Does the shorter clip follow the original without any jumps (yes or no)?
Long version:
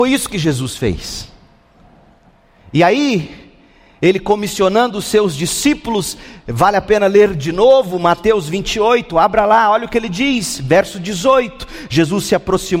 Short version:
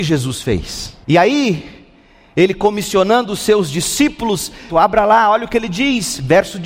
no